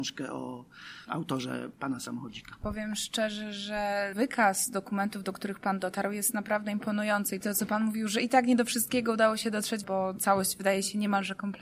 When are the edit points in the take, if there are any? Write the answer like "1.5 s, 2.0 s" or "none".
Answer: 9.8 s